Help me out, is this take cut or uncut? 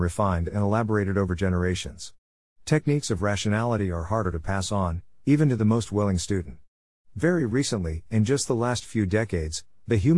uncut